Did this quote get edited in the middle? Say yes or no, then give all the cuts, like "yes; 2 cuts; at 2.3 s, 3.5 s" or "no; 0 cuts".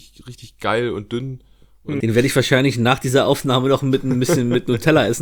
yes; 1 cut; at 2.0 s